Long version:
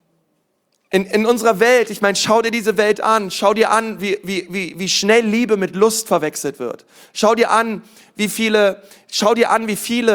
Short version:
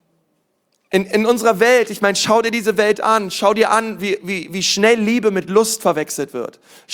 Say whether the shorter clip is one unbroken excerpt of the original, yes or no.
no